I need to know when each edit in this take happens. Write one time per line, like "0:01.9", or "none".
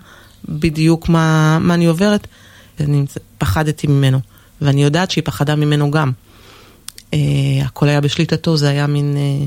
0:02.8

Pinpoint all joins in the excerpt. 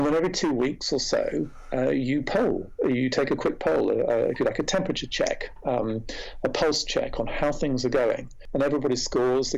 none

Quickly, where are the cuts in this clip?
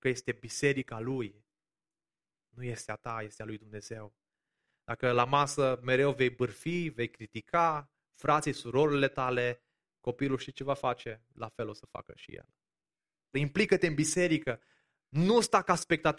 0:13.3

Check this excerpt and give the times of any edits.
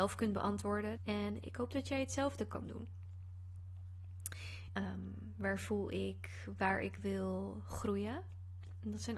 0:01.0
0:04.7

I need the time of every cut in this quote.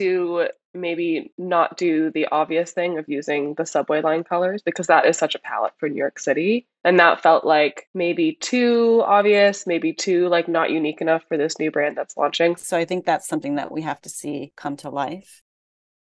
0:12.6

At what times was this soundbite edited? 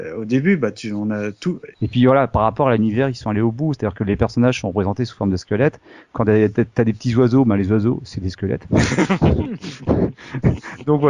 0:01.7

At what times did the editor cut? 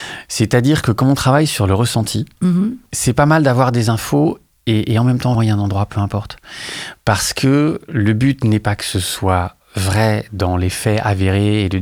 0:02.9
0:05.3

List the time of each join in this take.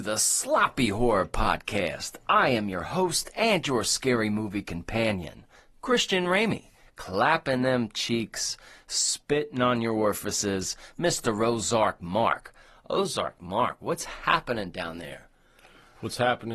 0:06.9

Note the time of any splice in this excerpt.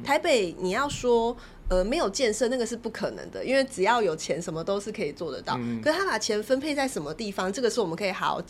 none

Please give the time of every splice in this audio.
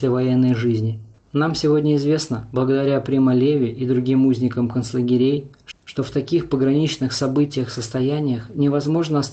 0:01.2

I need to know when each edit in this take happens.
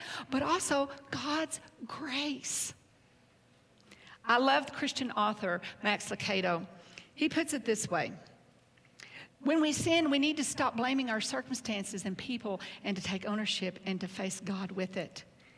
0:09.3

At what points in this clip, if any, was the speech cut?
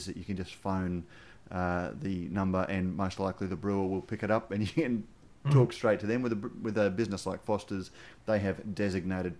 none

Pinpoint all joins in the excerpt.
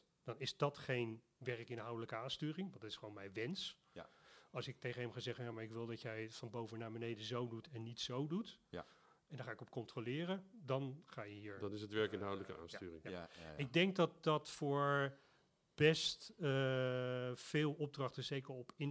none

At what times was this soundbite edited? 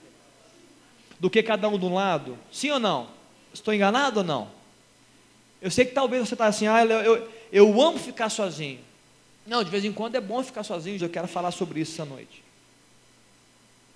0:03.5
0:11.0

